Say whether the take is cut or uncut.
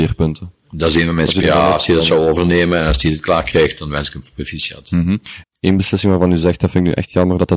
cut